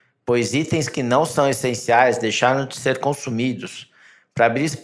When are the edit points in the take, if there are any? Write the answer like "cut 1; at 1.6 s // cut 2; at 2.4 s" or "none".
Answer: none

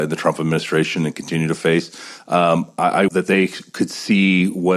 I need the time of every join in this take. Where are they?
cut 1; at 3.1 s

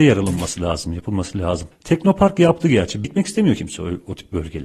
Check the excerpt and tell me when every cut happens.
cut 1; at 3.0 s

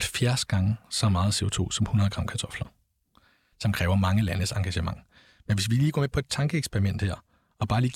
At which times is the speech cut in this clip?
cut 1; at 3.5 s

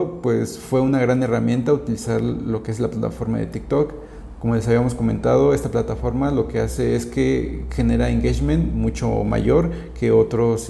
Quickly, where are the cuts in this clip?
none

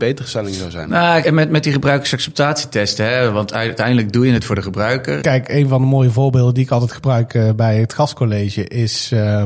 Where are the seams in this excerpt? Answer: cut 1; at 1.2 s // cut 2; at 5.2 s

